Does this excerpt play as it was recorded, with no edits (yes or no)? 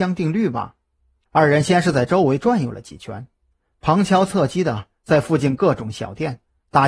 no